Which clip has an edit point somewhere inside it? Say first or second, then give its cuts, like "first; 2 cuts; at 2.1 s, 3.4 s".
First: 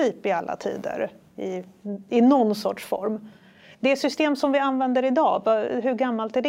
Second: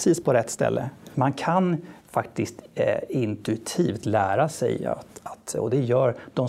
second; 1 cut; at 1.1 s